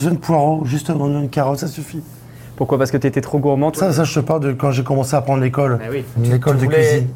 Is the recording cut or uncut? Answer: cut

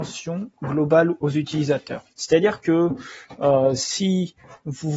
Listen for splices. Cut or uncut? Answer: uncut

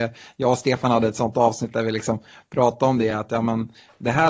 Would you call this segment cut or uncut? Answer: uncut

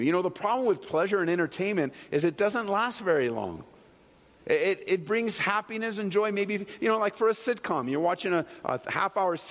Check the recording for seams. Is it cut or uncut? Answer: uncut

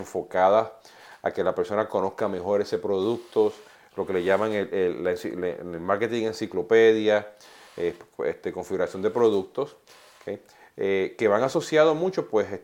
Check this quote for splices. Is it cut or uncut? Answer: uncut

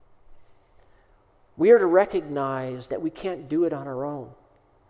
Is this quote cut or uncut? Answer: cut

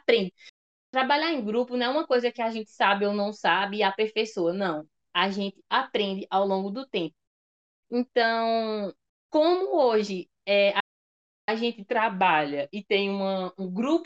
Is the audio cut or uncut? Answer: cut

